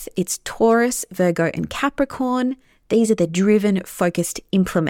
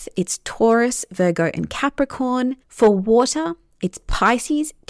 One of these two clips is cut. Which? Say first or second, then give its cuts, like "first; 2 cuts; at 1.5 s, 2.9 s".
second; 1 cut; at 2.6 s